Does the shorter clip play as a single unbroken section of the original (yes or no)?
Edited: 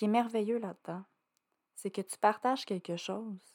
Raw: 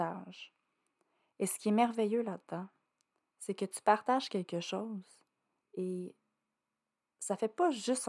yes